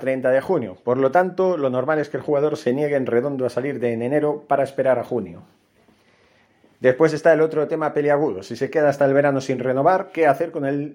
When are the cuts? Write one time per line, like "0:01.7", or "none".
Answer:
none